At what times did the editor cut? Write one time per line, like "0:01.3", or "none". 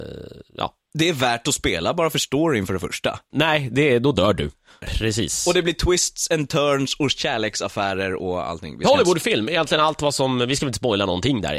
0:03.3
0:04.8